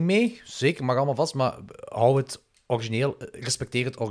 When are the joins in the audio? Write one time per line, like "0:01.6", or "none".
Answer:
none